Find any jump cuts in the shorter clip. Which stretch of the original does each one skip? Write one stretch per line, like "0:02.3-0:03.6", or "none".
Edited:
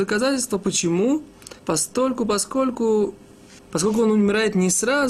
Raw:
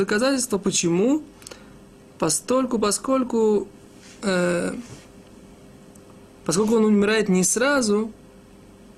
0:01.6-0:02.1
0:04.1-0:06.3